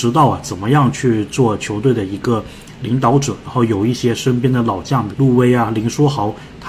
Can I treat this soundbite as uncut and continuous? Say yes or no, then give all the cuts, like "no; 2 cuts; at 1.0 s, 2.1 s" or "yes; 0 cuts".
no; 2 cuts; at 3.4 s, 5.1 s